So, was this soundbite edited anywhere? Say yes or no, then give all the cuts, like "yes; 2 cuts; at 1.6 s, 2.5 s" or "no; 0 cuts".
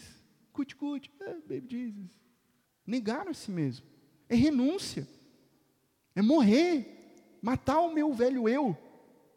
yes; 1 cut; at 2.6 s